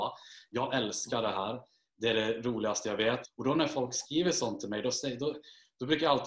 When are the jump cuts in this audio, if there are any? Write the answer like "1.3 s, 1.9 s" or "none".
3.2 s